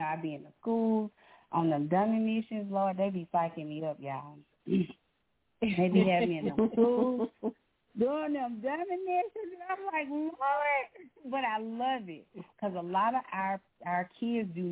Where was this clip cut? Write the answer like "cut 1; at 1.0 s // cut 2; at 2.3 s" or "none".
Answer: none

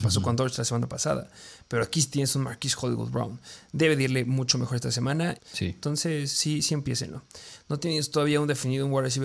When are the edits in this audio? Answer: cut 1; at 5.4 s // cut 2; at 7.6 s

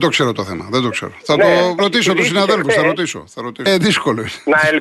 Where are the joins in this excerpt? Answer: cut 1; at 1.8 s // cut 2; at 3.7 s

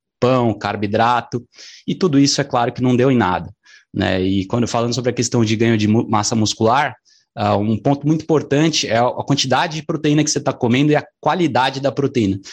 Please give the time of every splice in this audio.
none

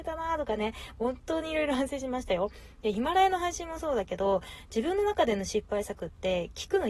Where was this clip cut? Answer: none

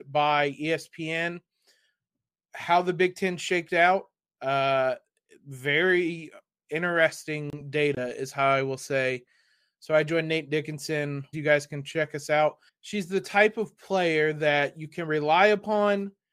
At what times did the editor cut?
cut 1; at 11.3 s // cut 2; at 12.7 s

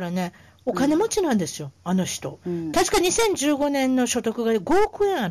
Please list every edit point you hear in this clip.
cut 1; at 2.4 s

